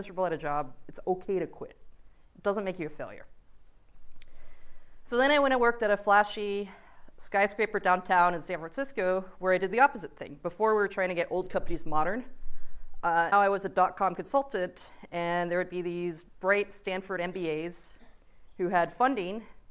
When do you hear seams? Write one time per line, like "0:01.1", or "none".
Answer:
0:13.3
0:16.3